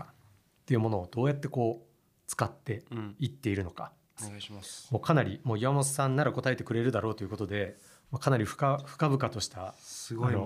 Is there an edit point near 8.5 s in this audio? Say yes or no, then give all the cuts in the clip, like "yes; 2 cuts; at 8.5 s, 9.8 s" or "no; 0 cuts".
no; 1 cut; at 4.2 s